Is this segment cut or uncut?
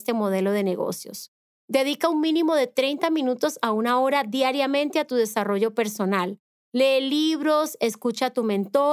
cut